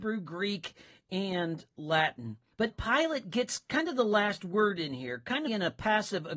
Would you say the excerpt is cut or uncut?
cut